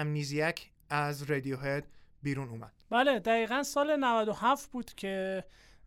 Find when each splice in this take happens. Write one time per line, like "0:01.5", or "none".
0:02.8